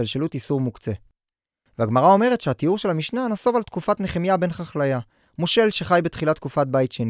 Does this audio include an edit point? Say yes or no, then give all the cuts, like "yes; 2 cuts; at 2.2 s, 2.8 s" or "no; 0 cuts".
no; 0 cuts